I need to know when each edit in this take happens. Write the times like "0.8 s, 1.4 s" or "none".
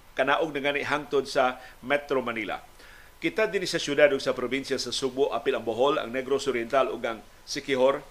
none